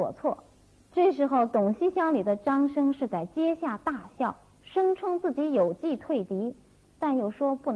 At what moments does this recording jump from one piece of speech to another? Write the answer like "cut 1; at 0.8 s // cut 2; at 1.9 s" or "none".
none